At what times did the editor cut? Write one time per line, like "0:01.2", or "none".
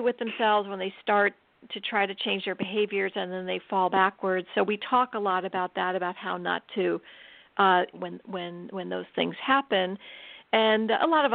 0:07.9